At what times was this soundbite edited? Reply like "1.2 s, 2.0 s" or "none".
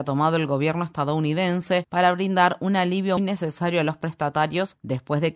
3.2 s